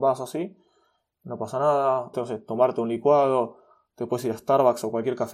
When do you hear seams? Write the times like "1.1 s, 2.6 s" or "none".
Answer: 2.1 s